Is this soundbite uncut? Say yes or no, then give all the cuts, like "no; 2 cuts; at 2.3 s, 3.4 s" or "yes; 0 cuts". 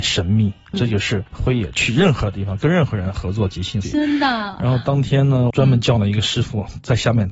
no; 2 cuts; at 3.8 s, 5.5 s